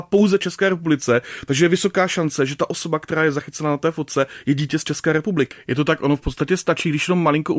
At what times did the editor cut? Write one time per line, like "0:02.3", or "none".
0:05.5